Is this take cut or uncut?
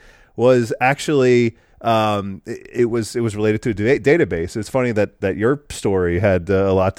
uncut